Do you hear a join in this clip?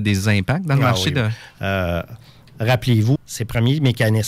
yes; 2 cuts; at 1.5 s, 3.2 s

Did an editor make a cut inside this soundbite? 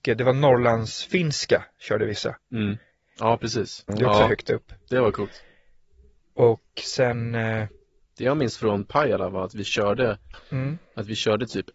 yes; 2 cuts; at 3.9 s, 10.3 s

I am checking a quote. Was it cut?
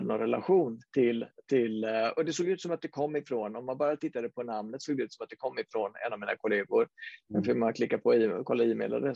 no; 0 cuts

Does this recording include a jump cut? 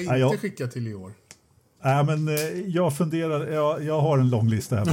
no; 0 cuts

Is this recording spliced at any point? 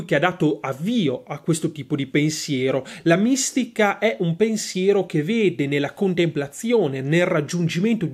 no; 0 cuts

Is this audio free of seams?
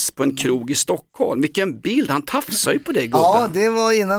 yes; 0 cuts

